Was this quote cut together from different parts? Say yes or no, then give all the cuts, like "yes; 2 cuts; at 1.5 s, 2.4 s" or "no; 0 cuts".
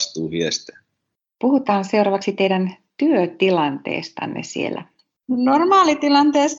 yes; 1 cut; at 5.2 s